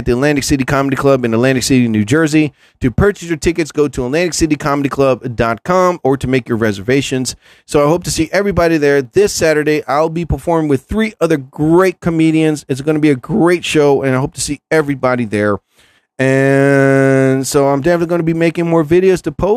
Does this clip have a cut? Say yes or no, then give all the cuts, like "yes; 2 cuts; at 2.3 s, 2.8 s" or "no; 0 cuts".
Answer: no; 0 cuts